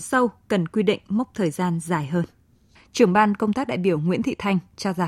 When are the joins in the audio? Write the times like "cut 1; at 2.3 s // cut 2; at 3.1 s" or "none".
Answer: cut 1; at 2.8 s